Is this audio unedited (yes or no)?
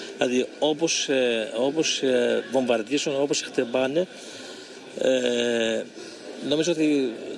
yes